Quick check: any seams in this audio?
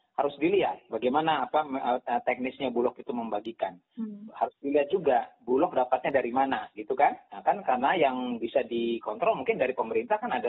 no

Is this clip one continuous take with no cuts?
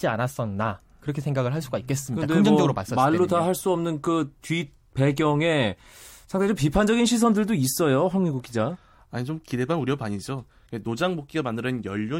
yes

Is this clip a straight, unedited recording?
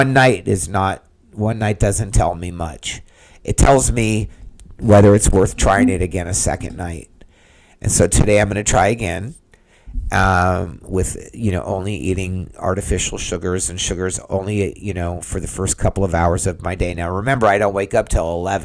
yes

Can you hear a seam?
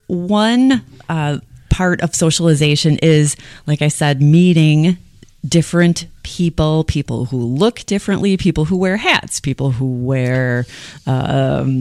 no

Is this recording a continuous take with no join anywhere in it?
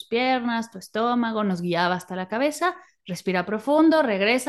yes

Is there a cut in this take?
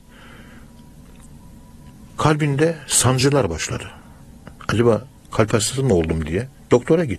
no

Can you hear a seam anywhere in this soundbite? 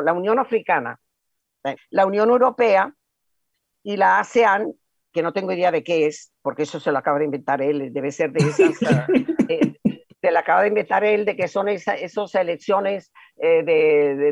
yes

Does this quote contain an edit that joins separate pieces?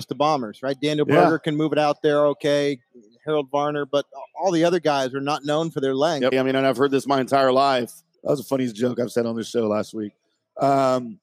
yes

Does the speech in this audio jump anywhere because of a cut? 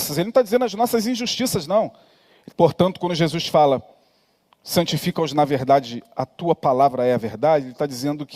yes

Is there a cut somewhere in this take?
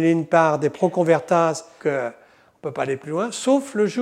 yes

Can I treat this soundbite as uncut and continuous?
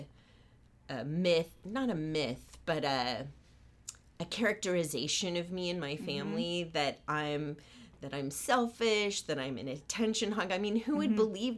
yes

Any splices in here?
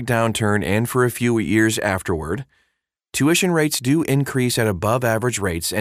no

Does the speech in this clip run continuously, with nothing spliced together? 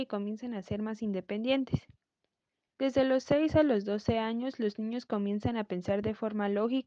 no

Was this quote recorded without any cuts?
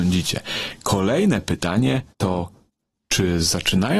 no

